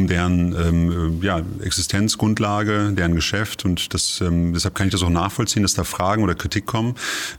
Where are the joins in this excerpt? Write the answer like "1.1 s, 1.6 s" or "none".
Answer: none